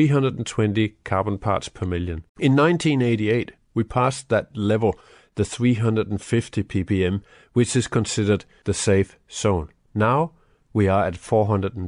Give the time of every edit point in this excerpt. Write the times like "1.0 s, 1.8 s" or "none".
2.3 s, 9.8 s